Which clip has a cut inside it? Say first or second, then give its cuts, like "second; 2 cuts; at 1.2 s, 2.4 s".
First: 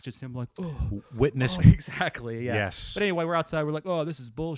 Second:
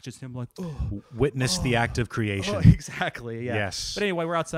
first; 1 cut; at 1.6 s